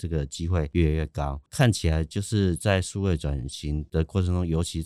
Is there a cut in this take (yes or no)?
no